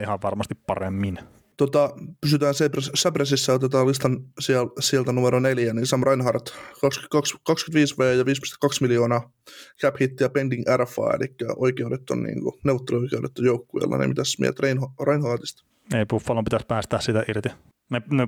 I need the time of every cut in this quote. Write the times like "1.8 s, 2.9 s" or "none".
1.5 s